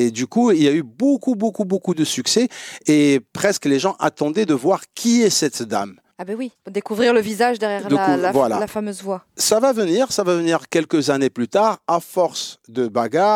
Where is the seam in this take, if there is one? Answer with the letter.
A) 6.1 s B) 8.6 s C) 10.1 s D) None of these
D